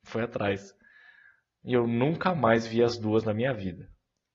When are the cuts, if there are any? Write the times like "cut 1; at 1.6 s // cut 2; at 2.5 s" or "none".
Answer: none